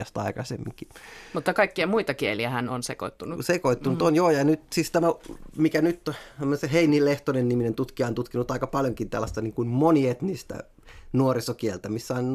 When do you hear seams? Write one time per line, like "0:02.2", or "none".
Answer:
none